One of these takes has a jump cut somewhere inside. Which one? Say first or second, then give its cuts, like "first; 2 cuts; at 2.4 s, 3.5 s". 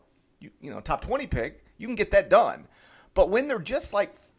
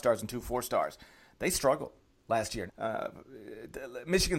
second; 1 cut; at 2.7 s